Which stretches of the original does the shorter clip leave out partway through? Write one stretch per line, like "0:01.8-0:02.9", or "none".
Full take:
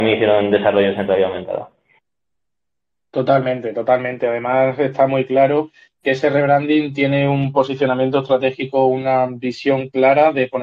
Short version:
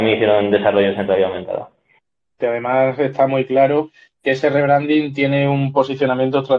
0:02.4-0:04.2